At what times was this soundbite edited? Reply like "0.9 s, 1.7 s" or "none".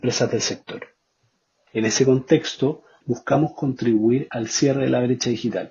1.7 s, 3.0 s